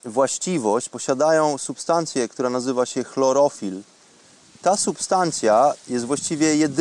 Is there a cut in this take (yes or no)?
no